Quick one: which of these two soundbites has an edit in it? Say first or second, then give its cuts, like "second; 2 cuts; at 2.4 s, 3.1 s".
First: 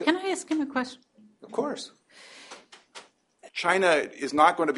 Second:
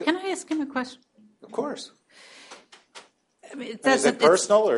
first; 1 cut; at 3.5 s